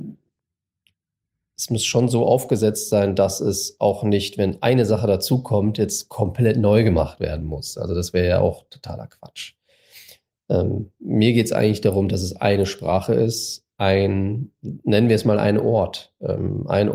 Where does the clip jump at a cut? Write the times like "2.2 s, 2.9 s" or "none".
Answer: none